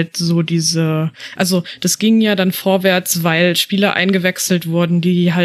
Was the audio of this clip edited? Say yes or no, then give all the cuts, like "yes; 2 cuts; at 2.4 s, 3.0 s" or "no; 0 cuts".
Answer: no; 0 cuts